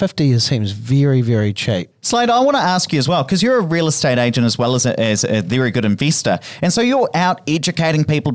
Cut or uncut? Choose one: cut